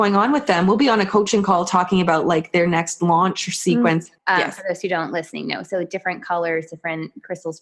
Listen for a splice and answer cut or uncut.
cut